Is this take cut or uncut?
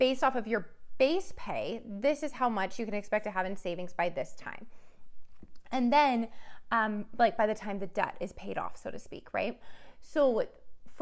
uncut